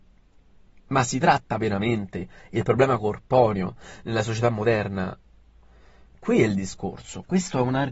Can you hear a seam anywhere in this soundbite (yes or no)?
no